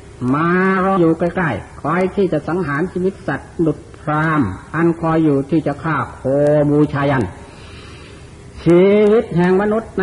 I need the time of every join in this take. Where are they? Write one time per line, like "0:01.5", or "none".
0:01.0